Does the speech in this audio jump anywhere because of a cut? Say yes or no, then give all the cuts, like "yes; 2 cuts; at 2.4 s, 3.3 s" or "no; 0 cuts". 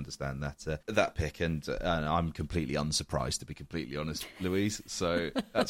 no; 0 cuts